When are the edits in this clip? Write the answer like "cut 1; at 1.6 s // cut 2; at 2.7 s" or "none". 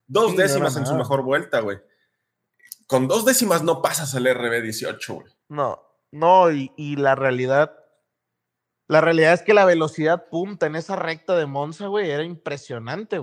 cut 1; at 5.4 s